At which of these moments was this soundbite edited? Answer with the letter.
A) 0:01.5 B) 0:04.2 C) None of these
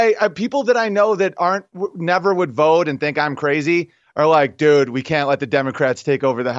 C